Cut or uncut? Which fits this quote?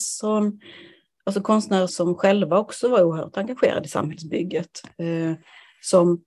cut